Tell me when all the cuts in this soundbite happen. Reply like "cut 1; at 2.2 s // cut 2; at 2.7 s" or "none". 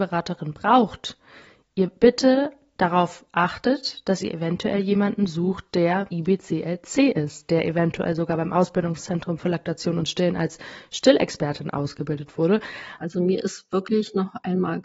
cut 1; at 6.1 s // cut 2; at 13.0 s